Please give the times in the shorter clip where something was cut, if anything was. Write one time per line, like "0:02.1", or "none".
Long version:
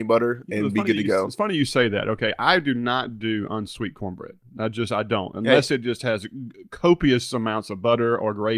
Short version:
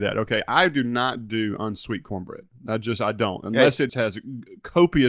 0:03.9